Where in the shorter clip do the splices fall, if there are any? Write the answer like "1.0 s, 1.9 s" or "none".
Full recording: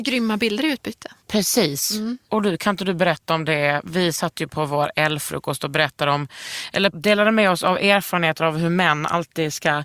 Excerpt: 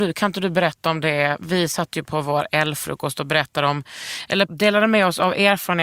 none